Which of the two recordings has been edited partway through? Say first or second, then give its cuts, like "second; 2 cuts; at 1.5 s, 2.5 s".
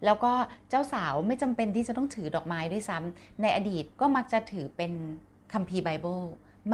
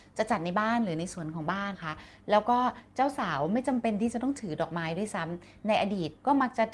second; 1 cut; at 1.7 s